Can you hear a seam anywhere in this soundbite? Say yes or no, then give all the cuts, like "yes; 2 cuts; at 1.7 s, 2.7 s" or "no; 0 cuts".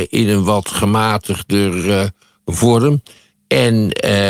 no; 0 cuts